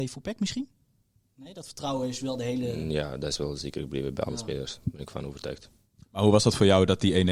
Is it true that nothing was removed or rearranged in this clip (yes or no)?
no